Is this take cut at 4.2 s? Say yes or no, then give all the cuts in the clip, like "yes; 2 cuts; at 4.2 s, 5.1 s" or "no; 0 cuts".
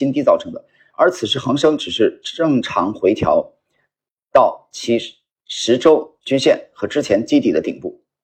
no; 0 cuts